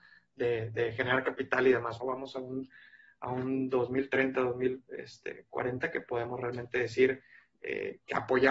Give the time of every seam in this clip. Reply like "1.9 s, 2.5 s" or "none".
2.0 s